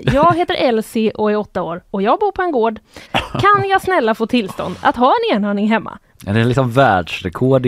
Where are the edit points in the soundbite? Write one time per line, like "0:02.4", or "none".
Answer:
0:03.1
0:06.2